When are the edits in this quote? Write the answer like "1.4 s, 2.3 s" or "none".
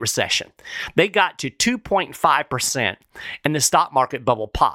none

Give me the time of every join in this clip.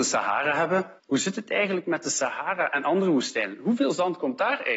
1.0 s

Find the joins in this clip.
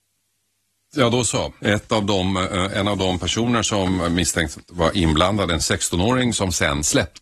1.6 s

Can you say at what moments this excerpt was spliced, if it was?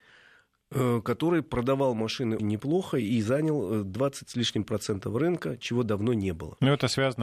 2.4 s

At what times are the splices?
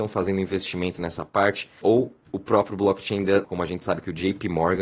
1.8 s, 3.4 s

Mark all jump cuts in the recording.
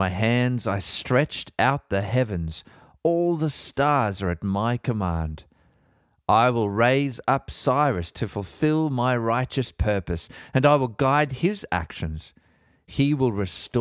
none

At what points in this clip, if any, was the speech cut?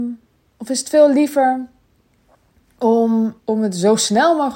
3.4 s

